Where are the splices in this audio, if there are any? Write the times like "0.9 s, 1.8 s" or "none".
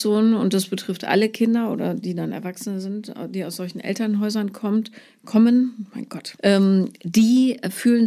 6.4 s